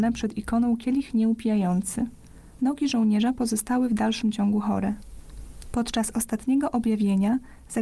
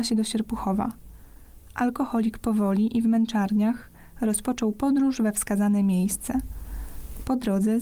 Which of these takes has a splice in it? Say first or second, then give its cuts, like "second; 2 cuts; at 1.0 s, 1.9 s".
first; 2 cuts; at 2.6 s, 5.6 s